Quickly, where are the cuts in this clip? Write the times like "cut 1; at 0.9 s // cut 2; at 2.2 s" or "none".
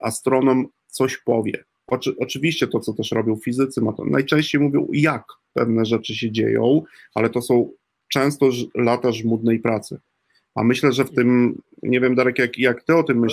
none